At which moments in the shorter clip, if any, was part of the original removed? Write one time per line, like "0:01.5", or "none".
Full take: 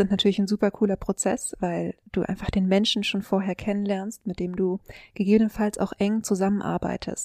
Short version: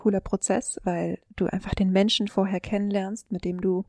0:02.3